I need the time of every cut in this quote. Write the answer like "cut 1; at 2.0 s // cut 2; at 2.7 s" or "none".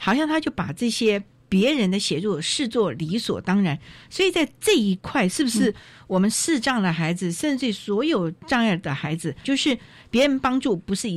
cut 1; at 9.4 s